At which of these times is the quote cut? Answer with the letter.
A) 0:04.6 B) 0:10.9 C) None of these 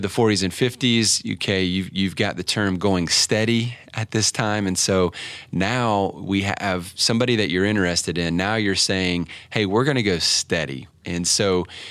B